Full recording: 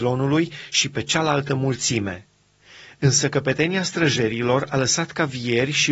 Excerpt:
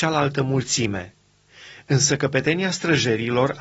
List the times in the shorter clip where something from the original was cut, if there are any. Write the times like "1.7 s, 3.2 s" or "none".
none